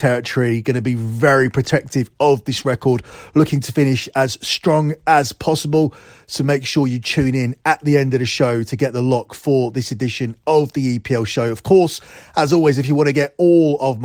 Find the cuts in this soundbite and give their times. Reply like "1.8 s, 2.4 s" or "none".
none